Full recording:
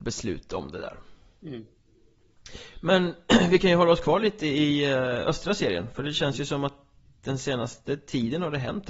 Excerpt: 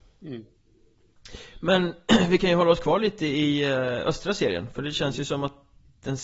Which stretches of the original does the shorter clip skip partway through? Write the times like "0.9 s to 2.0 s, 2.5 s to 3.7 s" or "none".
none